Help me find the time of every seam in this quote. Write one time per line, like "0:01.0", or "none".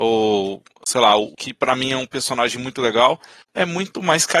0:01.3